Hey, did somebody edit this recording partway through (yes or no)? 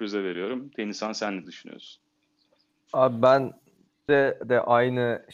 no